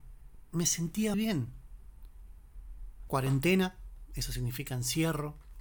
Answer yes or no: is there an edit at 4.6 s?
no